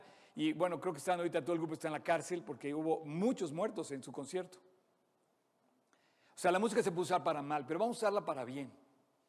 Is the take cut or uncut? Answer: uncut